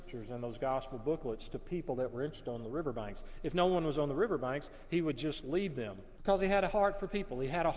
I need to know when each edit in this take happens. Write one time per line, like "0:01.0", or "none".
0:06.2